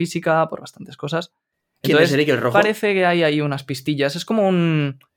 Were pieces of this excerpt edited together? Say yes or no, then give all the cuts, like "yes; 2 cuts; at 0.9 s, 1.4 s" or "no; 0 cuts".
no; 0 cuts